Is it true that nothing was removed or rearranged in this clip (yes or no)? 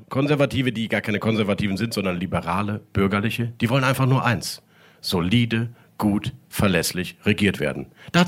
yes